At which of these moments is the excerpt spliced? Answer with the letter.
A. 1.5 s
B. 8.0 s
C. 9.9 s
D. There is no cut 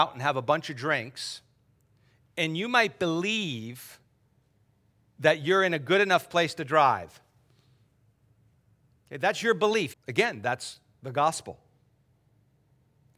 C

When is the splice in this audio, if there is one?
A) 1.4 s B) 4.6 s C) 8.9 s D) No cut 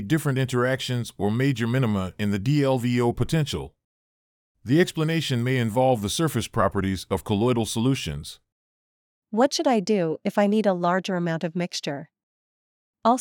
D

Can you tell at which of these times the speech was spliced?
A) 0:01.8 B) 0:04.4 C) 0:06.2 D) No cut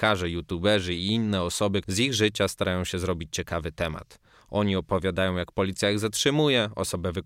A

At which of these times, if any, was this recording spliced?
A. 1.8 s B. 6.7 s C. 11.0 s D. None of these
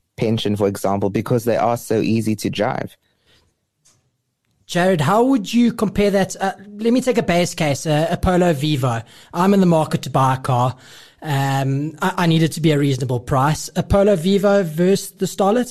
D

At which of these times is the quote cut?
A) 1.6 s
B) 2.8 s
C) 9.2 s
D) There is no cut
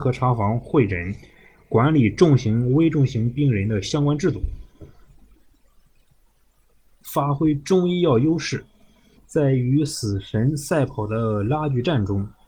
C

